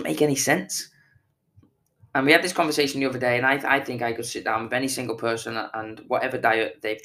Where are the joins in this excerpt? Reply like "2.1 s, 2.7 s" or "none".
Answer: none